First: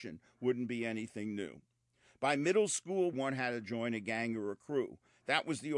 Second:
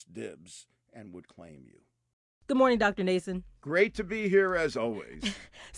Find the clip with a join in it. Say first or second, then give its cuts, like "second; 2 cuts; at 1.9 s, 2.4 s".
first; 1 cut; at 3.1 s